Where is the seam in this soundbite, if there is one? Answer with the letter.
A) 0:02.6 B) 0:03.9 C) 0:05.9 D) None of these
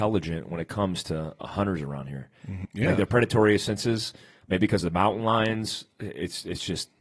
A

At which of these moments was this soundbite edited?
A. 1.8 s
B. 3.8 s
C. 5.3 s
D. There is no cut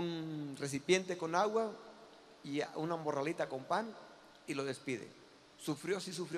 D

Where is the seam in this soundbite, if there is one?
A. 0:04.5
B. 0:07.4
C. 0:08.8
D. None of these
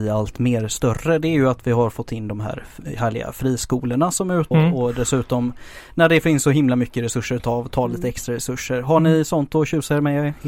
A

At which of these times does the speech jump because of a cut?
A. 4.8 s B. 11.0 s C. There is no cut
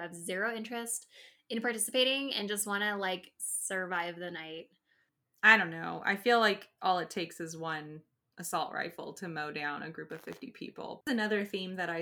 B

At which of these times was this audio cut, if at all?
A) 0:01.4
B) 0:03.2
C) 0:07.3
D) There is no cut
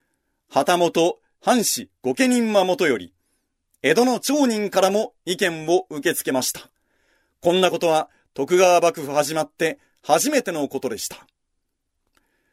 A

